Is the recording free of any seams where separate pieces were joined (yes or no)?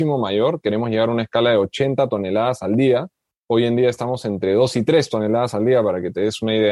yes